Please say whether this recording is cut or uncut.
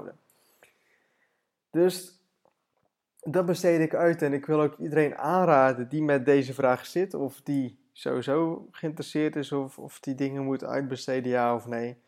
uncut